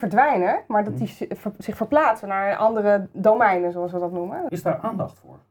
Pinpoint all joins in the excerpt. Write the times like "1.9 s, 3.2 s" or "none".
4.5 s

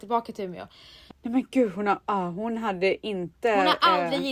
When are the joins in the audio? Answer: 1.1 s

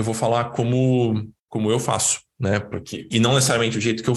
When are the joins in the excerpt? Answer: 1.4 s, 3.1 s

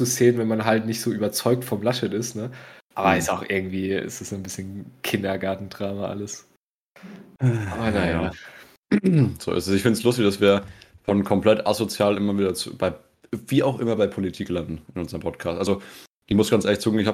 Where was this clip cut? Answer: none

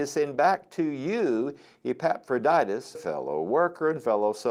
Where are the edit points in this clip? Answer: 2.9 s

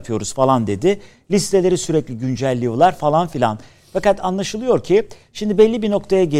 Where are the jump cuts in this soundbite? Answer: none

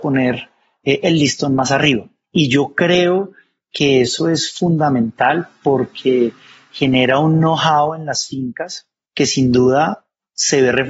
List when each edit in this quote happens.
none

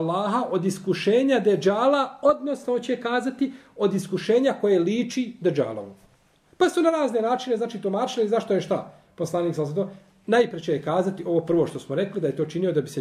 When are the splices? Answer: none

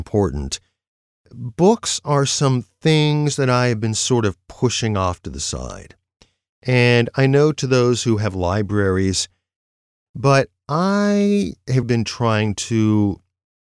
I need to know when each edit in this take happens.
10.1 s, 11.8 s

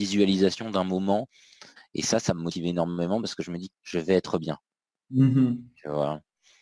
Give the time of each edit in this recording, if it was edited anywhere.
1.8 s, 3.7 s

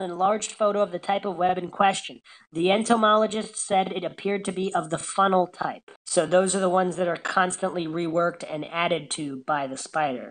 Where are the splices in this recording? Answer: 6.0 s

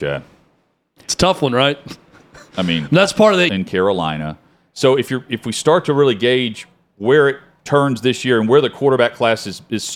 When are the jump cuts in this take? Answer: 3.5 s

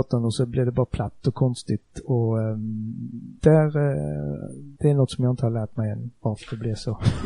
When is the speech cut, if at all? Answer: 3.4 s, 4.7 s

